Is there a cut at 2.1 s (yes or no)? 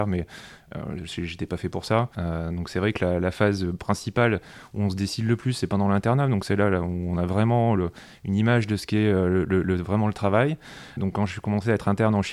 yes